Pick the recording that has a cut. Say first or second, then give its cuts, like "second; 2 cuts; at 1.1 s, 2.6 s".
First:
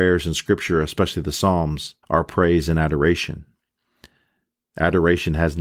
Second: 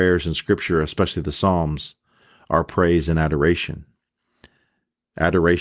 first; 1 cut; at 2.0 s